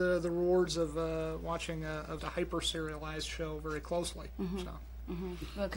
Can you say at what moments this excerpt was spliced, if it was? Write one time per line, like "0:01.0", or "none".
0:02.2

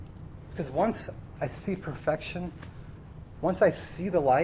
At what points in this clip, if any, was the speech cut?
0:01.4
0:03.4

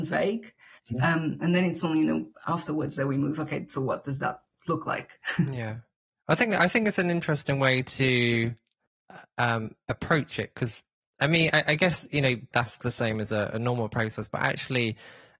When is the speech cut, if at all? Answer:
0:12.5

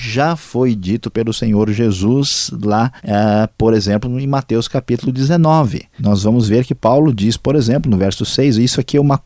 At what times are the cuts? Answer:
0:03.0
0:06.0

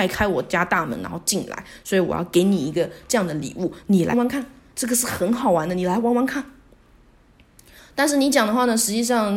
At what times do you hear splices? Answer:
0:04.1

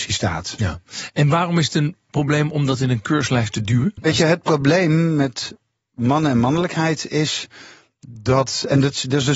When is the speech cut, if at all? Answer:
none

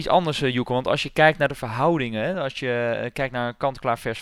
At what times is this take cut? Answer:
none

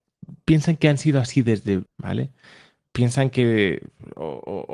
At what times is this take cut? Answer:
0:01.9

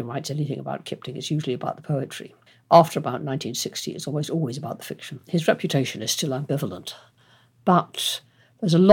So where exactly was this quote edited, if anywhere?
none

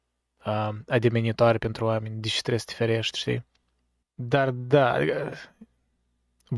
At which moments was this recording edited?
0:04.0

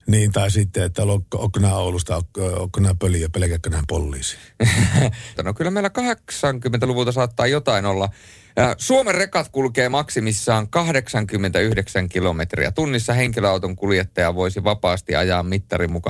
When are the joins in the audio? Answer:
0:05.4

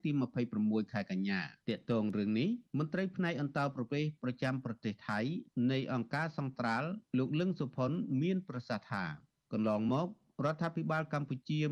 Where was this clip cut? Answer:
0:01.6

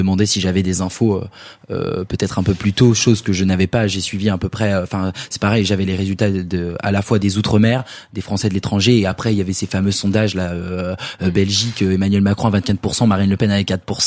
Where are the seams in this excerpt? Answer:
none

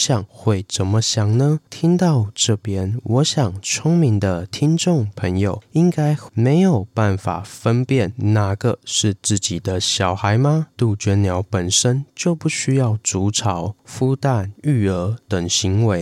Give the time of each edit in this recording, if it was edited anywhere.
0:06.3
0:10.7

